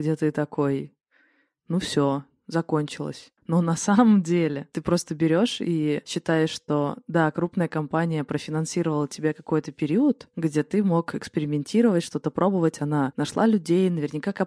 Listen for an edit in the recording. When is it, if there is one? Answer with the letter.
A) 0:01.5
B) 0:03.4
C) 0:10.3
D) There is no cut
B